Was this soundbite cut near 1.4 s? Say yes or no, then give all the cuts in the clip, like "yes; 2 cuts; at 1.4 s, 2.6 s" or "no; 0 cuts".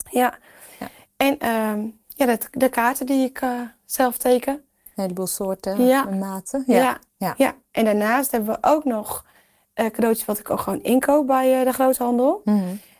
no; 1 cut; at 7.1 s